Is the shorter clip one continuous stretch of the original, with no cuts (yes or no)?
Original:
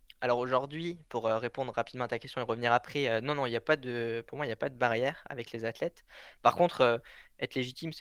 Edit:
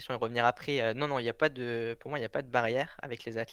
yes